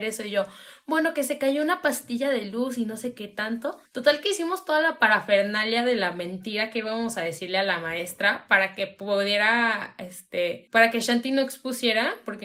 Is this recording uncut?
no; 1 cut; at 3.9 s

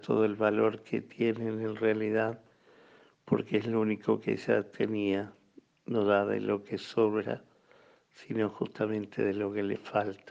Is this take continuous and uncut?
yes; 0 cuts

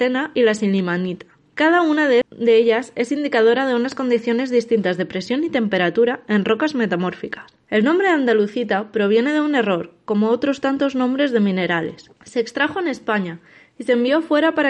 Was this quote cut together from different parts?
yes; 2 cuts; at 2.2 s, 7.6 s

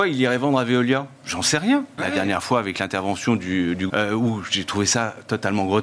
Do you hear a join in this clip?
yes; 2 cuts; at 2.0 s, 3.9 s

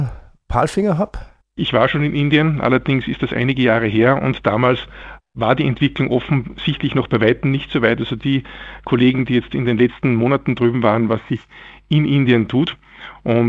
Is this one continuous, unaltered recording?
no; 1 cut; at 11.1 s

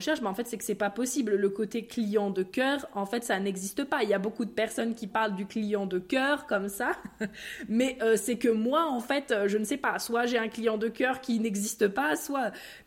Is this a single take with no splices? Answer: yes; 0 cuts

